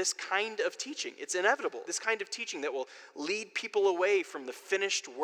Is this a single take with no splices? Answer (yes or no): no